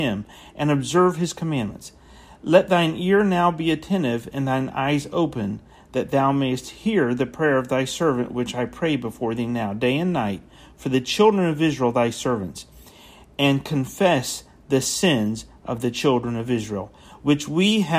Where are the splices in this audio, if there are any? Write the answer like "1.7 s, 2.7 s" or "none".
none